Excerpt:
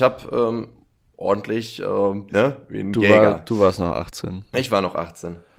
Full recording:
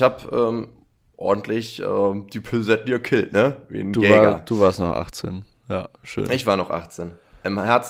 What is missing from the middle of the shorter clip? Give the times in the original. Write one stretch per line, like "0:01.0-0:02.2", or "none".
0:02.3-0:03.3
0:05.5-0:06.3